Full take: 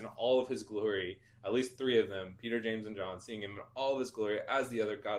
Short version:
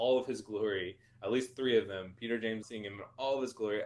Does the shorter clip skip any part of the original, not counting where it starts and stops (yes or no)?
yes